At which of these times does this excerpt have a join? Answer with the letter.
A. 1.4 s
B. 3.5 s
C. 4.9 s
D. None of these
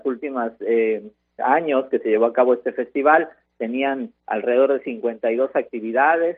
A